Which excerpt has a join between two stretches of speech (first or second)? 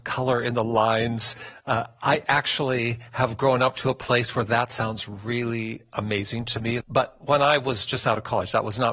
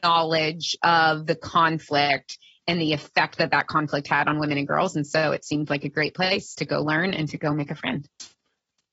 first